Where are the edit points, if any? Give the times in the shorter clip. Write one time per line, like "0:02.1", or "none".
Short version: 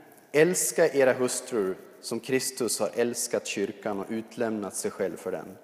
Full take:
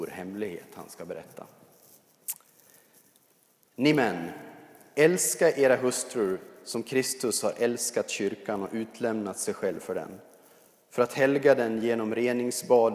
none